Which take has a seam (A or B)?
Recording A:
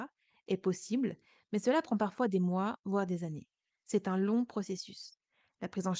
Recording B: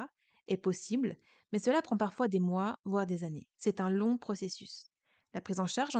B